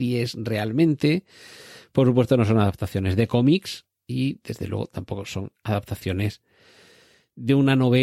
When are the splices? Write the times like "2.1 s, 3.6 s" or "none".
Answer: none